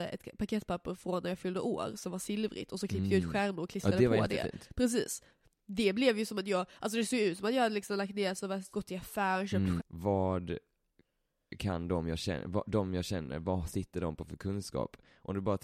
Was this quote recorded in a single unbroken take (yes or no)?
no